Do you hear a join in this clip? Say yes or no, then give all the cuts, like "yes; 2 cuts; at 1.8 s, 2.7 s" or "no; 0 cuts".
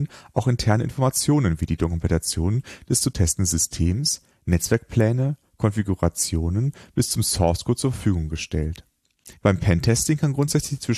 yes; 1 cut; at 9.3 s